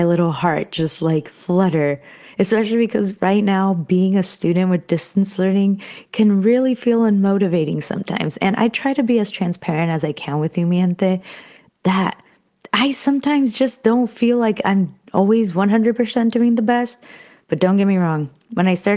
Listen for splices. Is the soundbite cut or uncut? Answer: cut